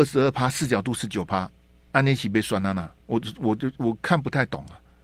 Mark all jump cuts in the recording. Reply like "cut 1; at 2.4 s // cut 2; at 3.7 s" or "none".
none